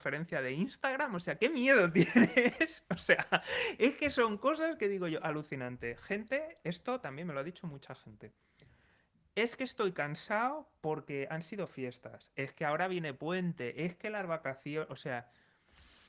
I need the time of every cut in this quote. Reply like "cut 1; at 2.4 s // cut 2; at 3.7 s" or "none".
none

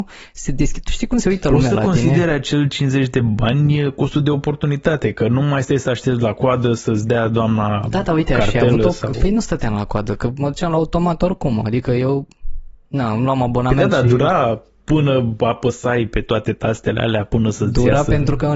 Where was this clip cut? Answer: none

